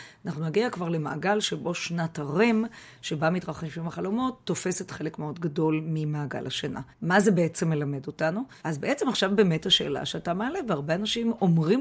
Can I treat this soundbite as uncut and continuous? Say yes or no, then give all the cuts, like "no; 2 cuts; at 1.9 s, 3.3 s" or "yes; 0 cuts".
no; 2 cuts; at 6.9 s, 8.6 s